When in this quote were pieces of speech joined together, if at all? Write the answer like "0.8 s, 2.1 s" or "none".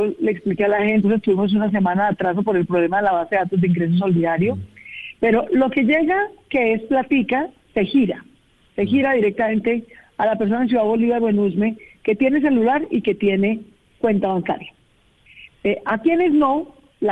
1.0 s